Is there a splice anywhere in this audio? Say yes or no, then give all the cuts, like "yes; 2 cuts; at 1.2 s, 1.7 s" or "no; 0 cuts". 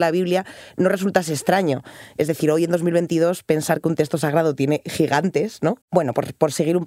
yes; 1 cut; at 5.8 s